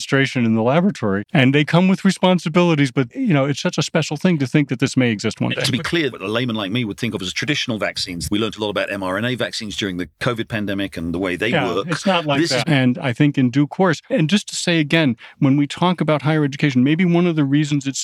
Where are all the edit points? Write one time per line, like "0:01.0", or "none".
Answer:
0:01.3
0:03.6
0:12.6